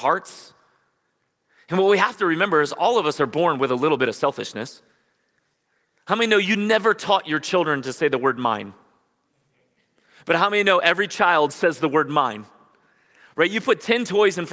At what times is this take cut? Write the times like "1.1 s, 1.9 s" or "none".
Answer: none